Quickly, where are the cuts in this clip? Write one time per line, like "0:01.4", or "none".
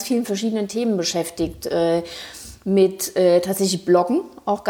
none